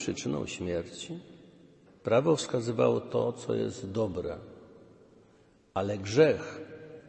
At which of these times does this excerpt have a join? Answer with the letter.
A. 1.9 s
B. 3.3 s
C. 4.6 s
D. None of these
A